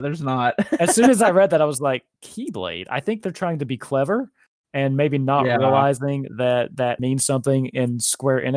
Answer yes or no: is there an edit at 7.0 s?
yes